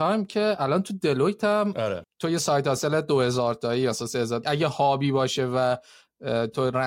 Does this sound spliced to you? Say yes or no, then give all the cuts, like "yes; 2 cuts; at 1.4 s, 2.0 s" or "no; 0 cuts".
yes; 2 cuts; at 2.0 s, 4.4 s